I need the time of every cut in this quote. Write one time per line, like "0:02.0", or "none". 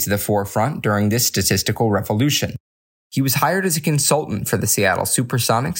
0:03.0